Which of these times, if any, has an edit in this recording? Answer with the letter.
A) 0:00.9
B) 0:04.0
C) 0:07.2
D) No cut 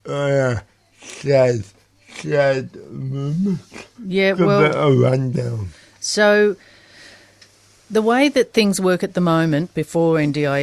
B